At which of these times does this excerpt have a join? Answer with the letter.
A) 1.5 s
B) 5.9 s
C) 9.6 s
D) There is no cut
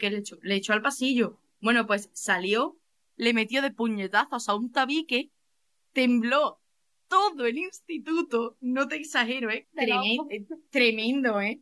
C